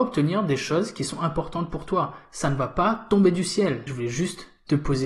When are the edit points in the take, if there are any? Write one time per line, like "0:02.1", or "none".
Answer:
0:03.9